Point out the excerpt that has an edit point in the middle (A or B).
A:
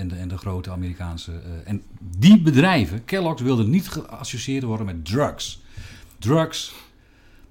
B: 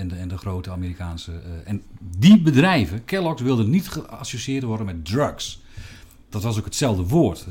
A